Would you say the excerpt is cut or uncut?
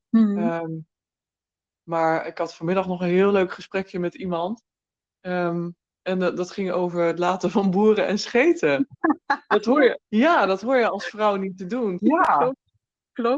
cut